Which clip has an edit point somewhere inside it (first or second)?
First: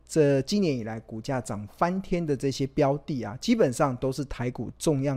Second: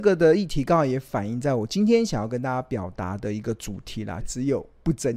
second